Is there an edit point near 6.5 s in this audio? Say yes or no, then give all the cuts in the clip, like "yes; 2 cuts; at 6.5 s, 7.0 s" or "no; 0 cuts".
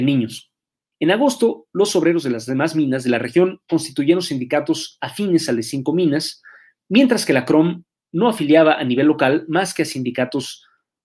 no; 1 cut; at 0.9 s